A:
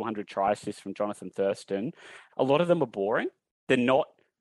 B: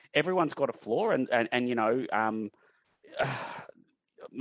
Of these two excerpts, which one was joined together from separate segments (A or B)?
A